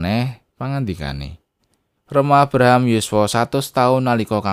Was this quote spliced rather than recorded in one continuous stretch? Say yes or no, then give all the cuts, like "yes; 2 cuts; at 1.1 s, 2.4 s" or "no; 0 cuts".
yes; 1 cut; at 2.0 s